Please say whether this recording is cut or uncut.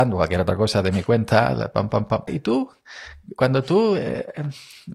cut